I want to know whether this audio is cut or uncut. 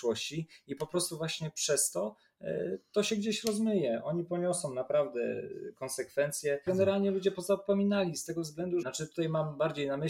cut